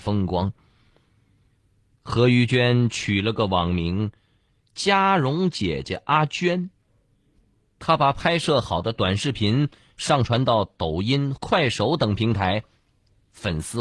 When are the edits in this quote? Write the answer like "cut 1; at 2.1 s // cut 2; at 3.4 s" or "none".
cut 1; at 11.4 s